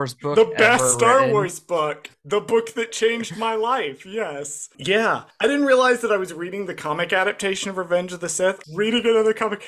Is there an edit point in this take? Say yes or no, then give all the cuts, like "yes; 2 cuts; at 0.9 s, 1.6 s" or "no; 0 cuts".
yes; 2 cuts; at 4.7 s, 8.6 s